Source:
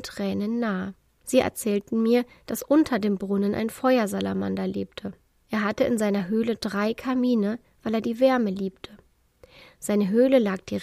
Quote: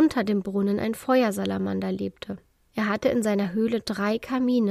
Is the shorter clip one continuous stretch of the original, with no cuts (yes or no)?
yes